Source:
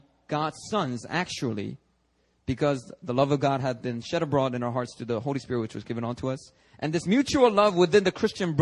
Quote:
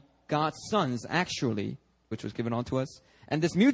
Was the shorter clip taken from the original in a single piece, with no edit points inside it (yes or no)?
no